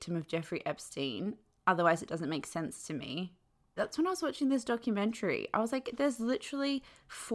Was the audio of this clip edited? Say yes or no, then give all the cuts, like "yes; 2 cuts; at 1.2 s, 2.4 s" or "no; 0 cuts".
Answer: yes; 1 cut; at 3.8 s